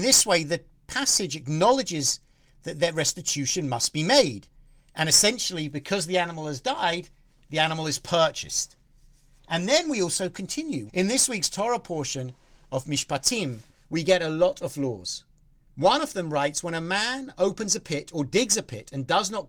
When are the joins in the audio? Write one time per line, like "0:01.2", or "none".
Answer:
0:10.9